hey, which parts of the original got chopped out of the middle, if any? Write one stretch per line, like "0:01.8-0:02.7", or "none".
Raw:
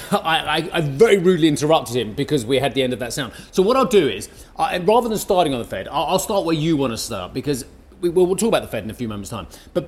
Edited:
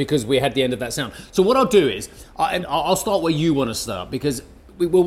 0:04.8-0:05.8